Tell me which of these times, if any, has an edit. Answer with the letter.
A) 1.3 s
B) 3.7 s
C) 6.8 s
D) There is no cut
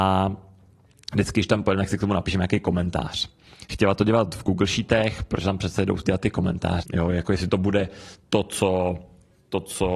C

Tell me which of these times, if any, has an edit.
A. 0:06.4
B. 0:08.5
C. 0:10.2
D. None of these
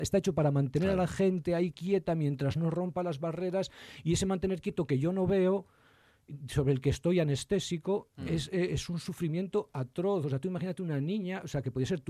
D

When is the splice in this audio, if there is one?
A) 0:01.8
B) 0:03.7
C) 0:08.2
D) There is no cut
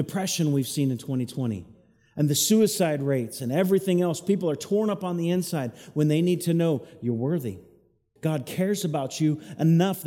C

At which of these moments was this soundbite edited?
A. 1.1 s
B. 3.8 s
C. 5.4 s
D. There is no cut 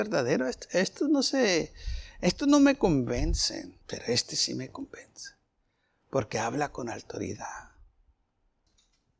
B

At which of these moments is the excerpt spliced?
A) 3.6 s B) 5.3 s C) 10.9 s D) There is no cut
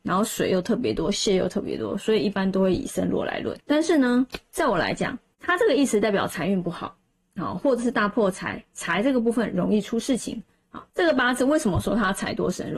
C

